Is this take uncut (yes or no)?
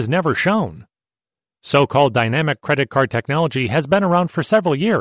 yes